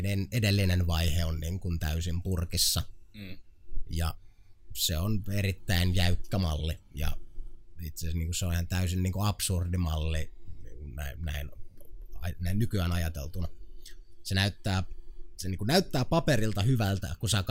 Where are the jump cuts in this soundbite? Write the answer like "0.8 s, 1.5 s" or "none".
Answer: none